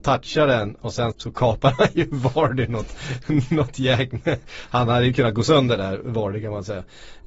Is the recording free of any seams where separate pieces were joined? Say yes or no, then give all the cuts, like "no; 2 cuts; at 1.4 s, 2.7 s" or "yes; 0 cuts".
no; 1 cut; at 1.1 s